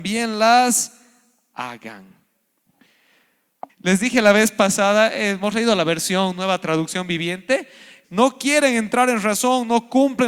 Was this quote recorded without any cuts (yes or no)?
no